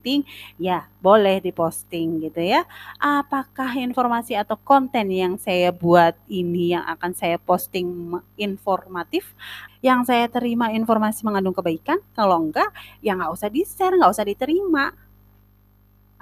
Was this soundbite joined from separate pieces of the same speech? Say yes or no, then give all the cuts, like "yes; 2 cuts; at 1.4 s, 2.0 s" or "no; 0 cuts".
yes; 1 cut; at 9.7 s